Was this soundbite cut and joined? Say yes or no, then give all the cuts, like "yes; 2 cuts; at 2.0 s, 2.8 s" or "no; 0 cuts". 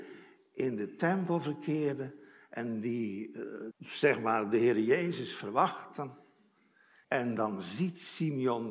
yes; 2 cuts; at 3.7 s, 7.0 s